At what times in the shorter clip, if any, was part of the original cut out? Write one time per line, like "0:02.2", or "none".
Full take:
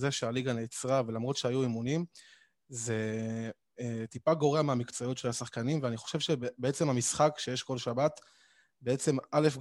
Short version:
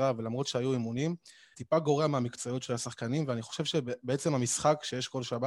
0:01.5